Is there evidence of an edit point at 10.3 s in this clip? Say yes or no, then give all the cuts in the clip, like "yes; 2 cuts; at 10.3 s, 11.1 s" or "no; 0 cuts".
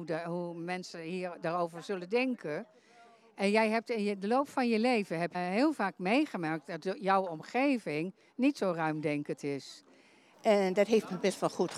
yes; 2 cuts; at 5.3 s, 10.3 s